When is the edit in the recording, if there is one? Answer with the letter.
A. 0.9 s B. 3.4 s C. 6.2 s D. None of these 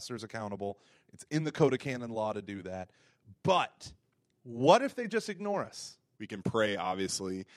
C